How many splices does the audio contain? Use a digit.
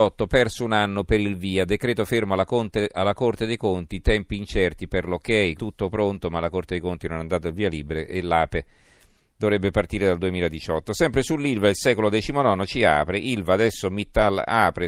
1